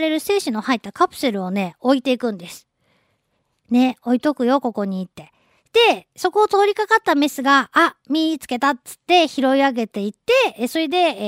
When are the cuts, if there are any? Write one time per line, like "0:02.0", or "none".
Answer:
none